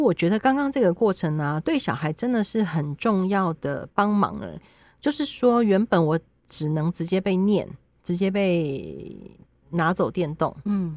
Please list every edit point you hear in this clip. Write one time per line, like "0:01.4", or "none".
none